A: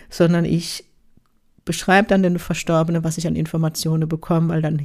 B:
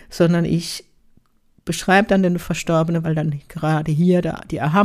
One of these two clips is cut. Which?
B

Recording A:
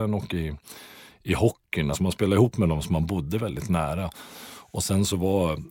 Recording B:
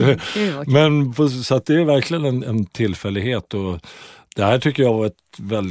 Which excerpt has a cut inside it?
A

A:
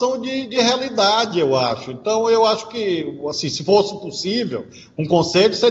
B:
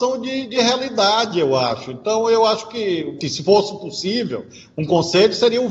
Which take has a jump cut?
B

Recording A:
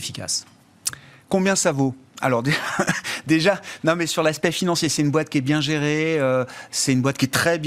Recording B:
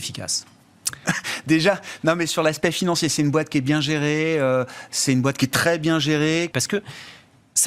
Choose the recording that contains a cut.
B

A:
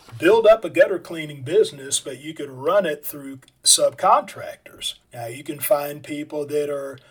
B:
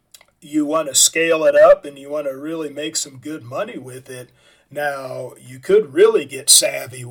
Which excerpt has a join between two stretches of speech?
A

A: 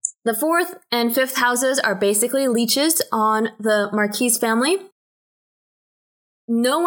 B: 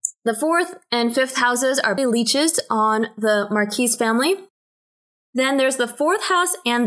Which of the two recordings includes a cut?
B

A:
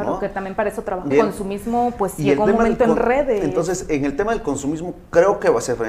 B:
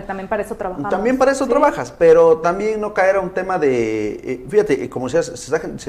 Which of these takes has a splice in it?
A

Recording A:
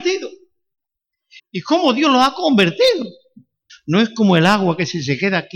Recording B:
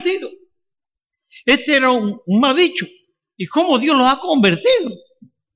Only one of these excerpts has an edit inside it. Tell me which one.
A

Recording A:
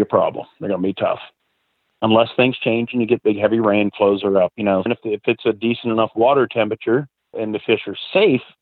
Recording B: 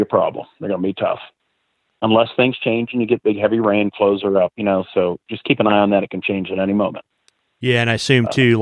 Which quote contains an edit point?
A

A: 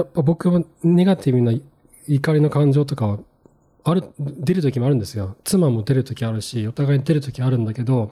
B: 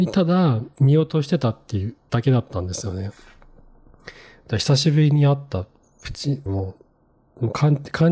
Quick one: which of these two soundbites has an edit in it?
B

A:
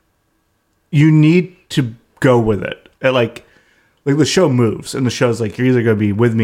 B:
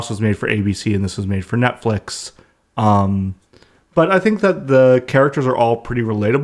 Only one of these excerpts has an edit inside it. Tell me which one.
A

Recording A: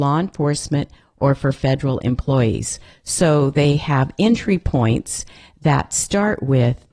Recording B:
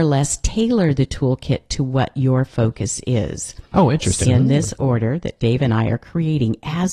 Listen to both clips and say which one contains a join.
B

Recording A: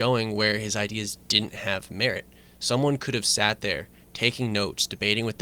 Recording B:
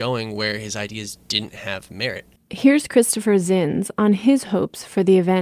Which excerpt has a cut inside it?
B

